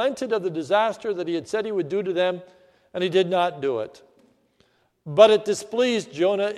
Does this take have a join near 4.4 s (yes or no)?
no